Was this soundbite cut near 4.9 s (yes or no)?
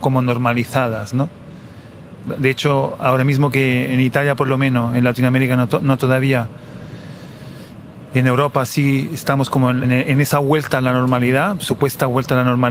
no